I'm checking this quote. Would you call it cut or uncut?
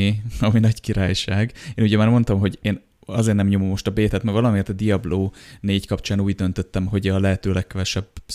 uncut